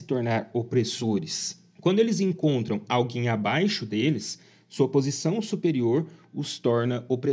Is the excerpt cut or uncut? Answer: uncut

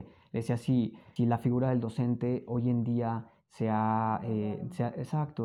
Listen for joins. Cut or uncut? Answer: cut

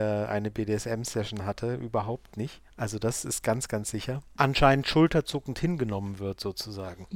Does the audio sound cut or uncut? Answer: cut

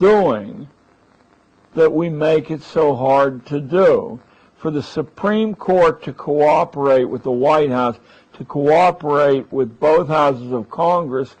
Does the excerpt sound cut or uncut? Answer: uncut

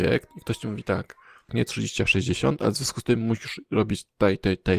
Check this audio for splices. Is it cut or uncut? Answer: cut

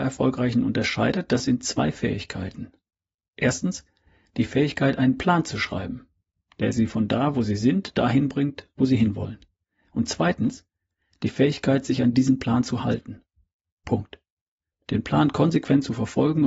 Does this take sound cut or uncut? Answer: uncut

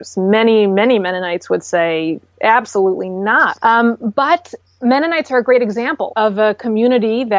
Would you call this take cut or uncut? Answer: cut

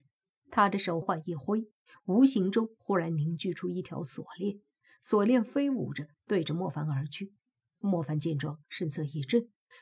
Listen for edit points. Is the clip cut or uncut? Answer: cut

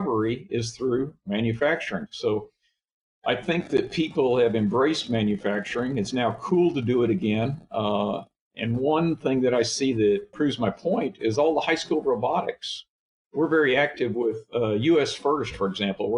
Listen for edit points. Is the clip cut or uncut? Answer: cut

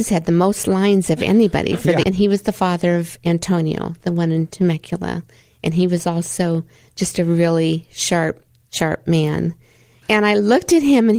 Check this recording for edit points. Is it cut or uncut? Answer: cut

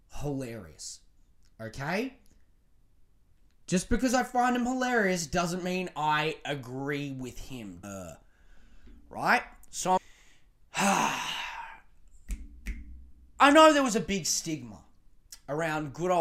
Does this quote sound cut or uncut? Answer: cut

